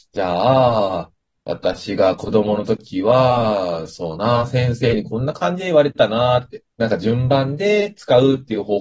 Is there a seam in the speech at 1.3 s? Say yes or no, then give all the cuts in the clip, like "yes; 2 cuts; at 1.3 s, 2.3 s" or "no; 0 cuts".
no; 1 cut; at 6.7 s